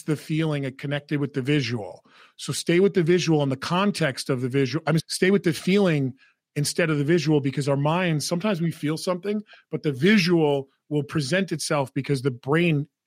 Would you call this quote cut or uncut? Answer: cut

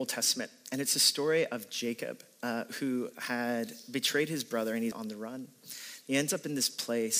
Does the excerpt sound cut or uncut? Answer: cut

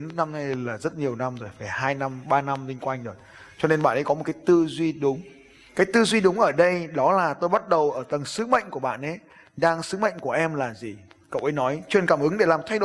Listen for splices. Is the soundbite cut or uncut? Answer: uncut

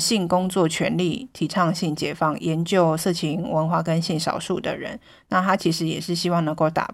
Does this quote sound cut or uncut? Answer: uncut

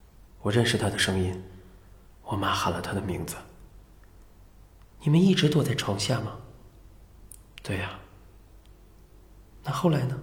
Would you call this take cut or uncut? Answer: uncut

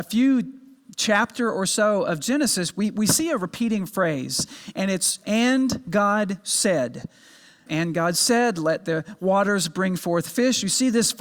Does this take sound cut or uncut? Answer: cut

